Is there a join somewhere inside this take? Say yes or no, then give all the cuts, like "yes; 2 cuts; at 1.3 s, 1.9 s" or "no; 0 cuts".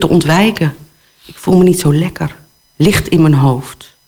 no; 0 cuts